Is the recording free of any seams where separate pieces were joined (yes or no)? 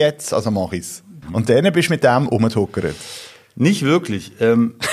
no